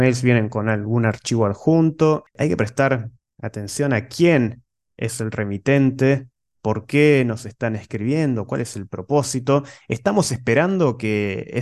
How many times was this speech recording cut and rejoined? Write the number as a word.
zero